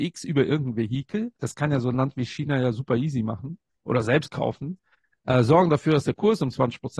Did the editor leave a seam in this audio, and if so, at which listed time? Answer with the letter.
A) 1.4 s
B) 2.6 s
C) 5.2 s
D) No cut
A